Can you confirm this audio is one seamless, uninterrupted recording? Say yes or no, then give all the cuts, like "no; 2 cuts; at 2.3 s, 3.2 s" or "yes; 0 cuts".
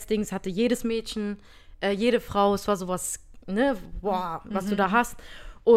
yes; 0 cuts